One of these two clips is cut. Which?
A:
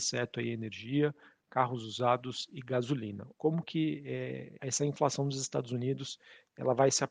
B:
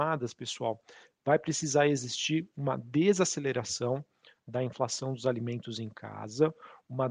A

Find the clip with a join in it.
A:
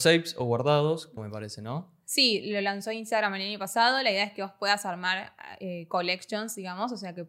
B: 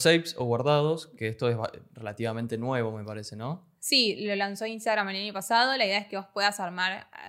A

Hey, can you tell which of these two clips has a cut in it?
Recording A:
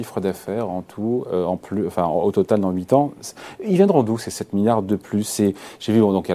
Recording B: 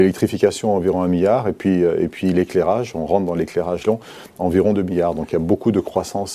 B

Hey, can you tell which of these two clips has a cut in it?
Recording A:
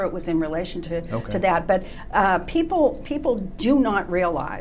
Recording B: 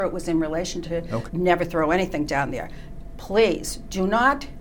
B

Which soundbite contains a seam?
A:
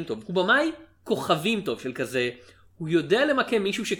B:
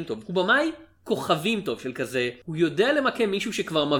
B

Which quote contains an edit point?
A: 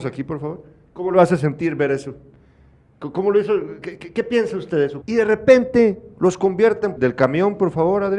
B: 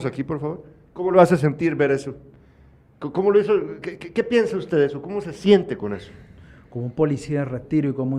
A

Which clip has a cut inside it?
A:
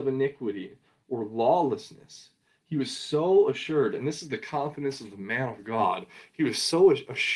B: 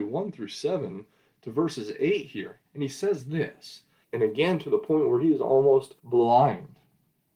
B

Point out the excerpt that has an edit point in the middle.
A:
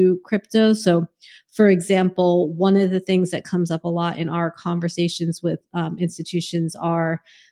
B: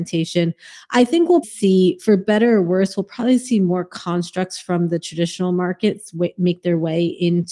B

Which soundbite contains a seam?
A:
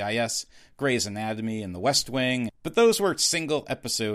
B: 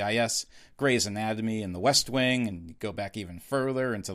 A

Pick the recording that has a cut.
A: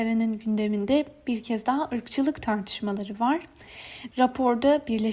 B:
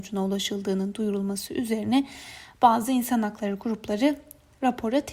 A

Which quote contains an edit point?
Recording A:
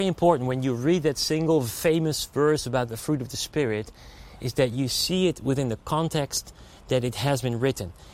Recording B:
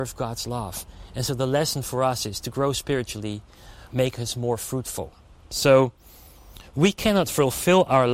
B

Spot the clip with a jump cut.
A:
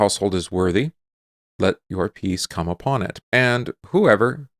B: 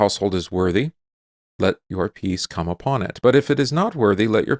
A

